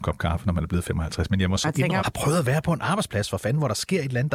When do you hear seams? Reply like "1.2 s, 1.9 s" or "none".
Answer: 2.0 s